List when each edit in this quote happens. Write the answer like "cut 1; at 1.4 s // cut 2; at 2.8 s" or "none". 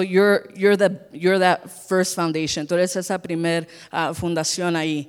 none